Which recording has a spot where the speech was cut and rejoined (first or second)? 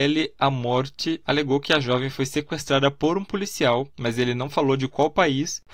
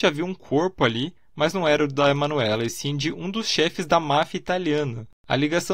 first